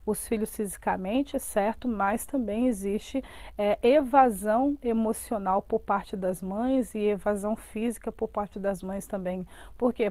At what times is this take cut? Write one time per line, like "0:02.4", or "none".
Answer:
none

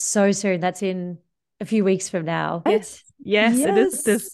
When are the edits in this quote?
0:02.7

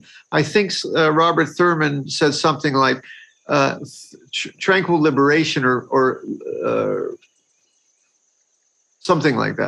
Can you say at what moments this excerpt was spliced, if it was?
none

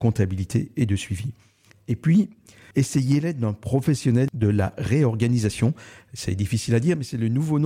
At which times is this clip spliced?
0:02.7

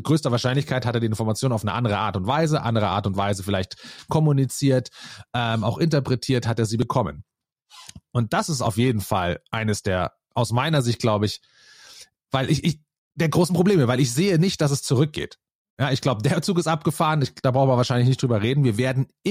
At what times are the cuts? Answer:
none

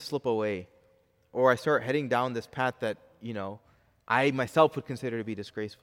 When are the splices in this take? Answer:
none

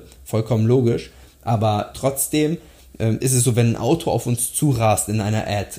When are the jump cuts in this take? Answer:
0:01.9

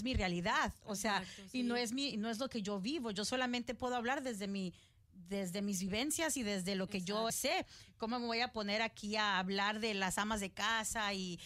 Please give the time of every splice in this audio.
0:07.3

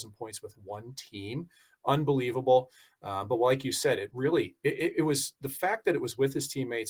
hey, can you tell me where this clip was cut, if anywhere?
none

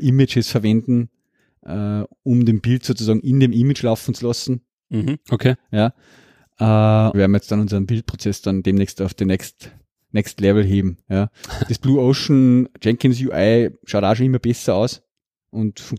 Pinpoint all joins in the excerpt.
0:05.2
0:07.1

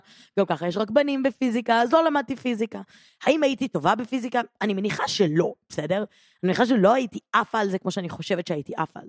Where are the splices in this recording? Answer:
none

